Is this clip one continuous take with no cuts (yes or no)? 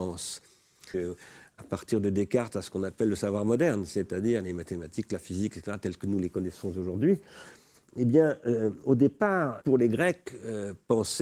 no